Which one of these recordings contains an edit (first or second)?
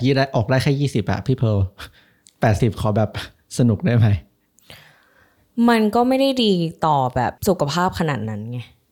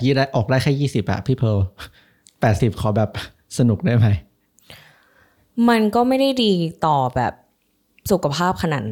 first